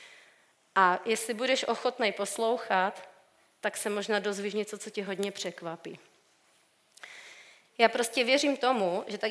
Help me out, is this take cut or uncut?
cut